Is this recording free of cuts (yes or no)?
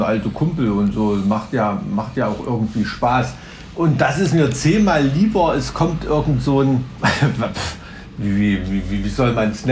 yes